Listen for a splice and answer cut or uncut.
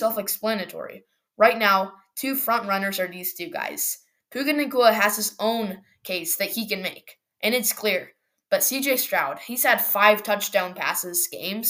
uncut